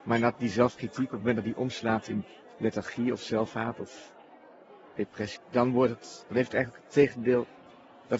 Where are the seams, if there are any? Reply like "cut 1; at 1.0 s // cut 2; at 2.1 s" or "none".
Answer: cut 1; at 5.4 s

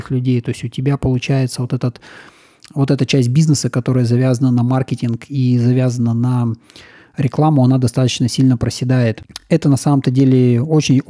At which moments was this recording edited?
none

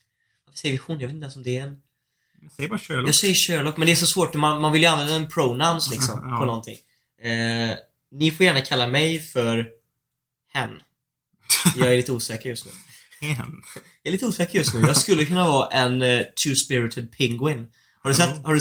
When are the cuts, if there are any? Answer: none

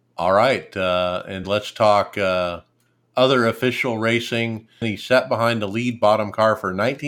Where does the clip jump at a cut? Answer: cut 1; at 1.4 s // cut 2; at 4.8 s

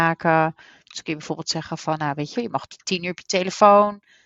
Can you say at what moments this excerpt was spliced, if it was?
cut 1; at 2.4 s

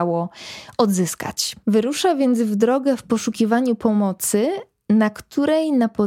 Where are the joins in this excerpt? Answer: none

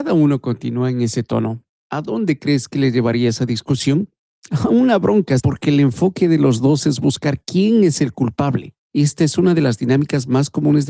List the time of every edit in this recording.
cut 1; at 5.4 s

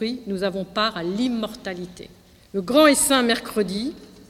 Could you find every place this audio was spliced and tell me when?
cut 1; at 2.4 s

